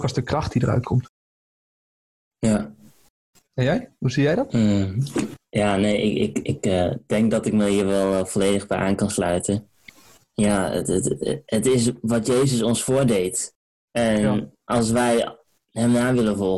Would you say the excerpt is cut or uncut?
uncut